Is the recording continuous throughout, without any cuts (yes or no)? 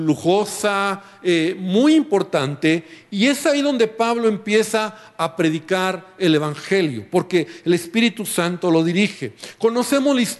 yes